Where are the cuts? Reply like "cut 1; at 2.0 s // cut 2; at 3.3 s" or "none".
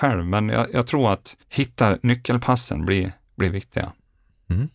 cut 1; at 1.4 s